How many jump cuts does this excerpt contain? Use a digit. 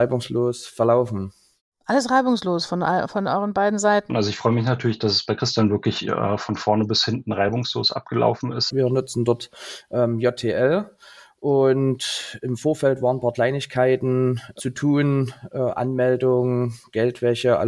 2